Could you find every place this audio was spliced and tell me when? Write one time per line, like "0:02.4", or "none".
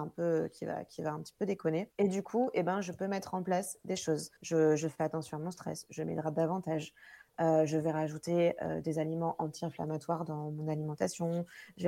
0:01.9
0:04.4
0:05.9